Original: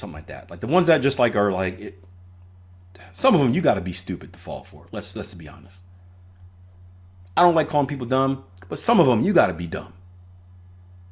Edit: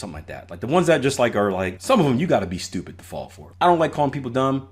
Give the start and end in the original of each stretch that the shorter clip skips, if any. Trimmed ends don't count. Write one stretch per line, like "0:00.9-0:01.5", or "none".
0:01.8-0:03.1
0:04.9-0:07.3